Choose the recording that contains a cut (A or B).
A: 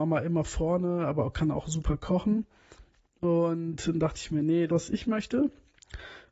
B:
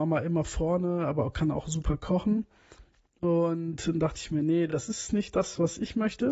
A